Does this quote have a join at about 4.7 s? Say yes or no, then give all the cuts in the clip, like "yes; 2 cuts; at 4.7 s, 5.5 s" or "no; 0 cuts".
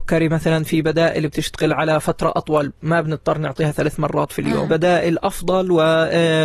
yes; 1 cut; at 4.7 s